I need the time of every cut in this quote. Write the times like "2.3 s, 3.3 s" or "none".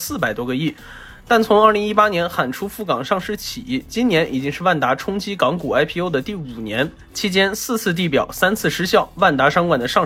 none